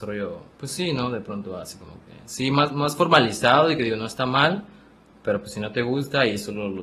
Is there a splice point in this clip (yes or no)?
no